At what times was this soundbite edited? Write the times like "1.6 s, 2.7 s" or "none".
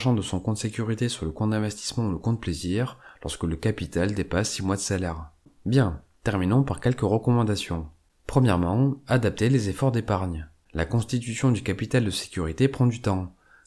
none